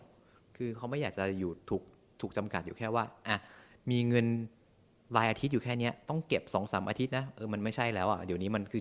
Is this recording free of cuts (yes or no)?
yes